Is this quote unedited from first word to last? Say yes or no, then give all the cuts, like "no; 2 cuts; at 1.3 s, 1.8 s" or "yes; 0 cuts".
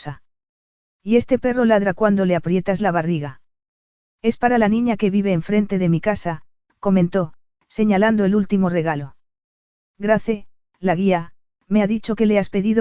yes; 0 cuts